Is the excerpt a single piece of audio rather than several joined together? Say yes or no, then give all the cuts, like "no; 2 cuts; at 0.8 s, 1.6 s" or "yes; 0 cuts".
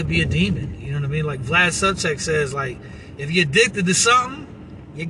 yes; 0 cuts